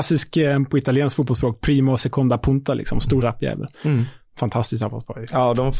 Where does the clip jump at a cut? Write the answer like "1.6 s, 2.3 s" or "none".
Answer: 3.2 s